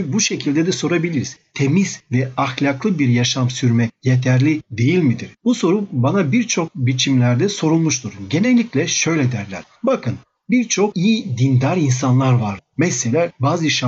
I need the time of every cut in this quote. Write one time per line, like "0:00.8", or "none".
none